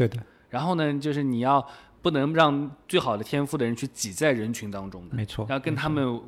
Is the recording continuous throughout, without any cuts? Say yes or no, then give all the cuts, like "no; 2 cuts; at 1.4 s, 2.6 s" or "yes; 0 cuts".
yes; 0 cuts